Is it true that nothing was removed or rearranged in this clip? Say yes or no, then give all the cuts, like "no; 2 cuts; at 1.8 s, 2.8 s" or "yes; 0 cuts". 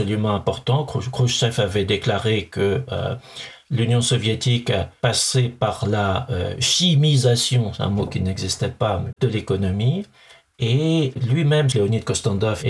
no; 2 cuts; at 9.1 s, 11.7 s